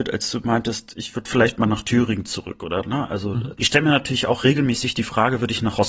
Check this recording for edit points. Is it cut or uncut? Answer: cut